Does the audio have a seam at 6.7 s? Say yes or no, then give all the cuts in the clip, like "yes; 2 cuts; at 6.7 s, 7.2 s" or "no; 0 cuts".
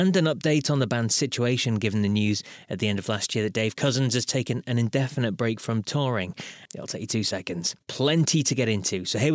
yes; 2 cuts; at 6.7 s, 7.8 s